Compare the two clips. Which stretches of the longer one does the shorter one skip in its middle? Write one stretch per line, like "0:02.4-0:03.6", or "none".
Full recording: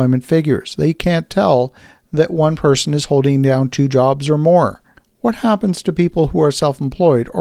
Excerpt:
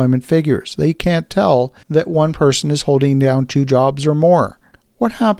0:01.8-0:02.1